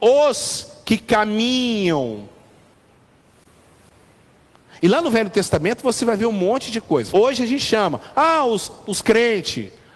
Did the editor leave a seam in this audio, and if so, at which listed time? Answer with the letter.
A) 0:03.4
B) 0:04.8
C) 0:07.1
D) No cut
C